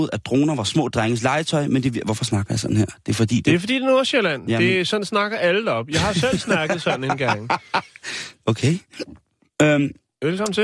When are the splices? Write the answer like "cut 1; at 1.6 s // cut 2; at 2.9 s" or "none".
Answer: none